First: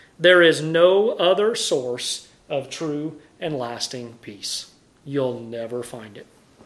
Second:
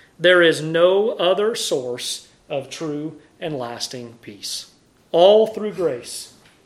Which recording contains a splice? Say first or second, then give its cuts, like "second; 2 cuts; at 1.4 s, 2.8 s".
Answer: second; 1 cut; at 5.0 s